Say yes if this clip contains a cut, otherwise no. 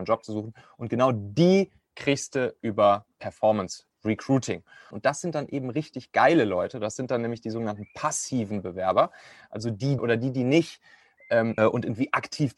yes